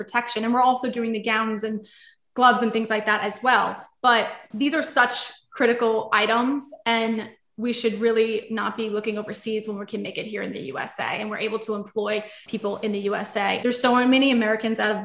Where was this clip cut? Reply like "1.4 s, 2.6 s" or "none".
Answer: 13.6 s